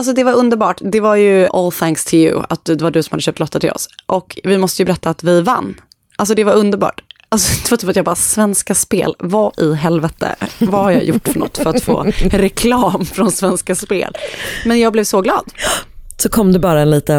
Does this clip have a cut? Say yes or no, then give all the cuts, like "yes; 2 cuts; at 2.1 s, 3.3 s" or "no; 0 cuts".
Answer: yes; 1 cut; at 1.5 s